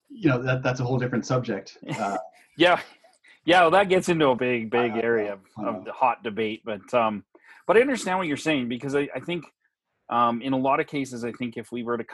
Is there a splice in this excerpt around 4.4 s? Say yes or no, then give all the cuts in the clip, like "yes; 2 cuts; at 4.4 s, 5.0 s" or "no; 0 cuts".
yes; 1 cut; at 4.4 s